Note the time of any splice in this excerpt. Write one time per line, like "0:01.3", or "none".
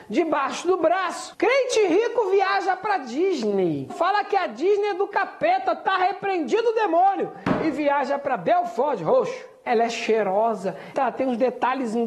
0:03.9
0:09.7
0:10.9